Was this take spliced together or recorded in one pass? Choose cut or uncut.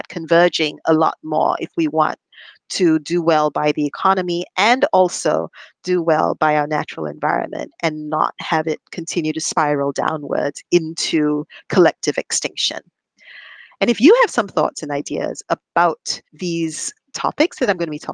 cut